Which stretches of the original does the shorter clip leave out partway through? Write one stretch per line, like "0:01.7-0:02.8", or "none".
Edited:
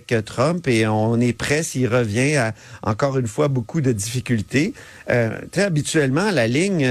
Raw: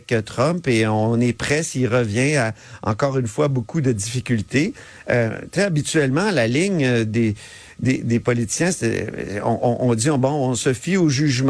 none